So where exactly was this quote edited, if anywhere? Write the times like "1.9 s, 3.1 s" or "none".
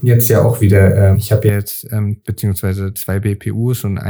1.1 s, 2.2 s